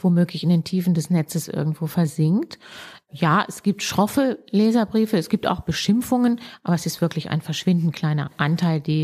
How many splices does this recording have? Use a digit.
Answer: 0